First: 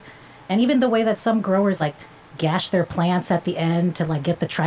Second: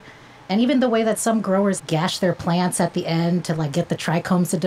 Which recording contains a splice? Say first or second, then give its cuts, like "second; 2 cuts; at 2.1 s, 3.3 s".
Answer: second; 1 cut; at 1.8 s